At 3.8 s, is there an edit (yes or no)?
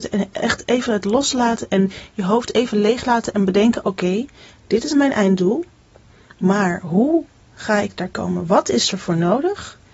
no